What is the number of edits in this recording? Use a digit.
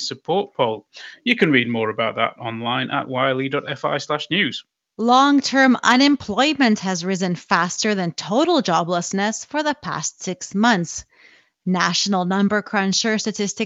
0